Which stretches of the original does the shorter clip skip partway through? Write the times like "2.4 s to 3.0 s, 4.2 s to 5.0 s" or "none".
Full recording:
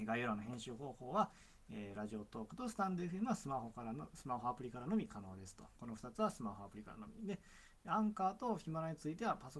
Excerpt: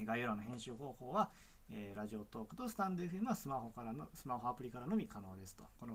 none